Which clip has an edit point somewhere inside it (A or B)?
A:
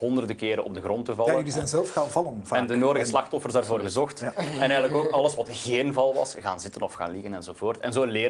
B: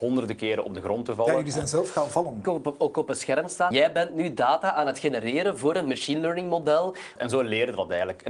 B